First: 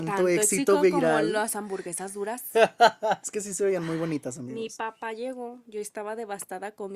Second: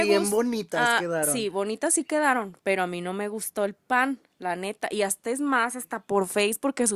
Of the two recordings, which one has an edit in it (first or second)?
first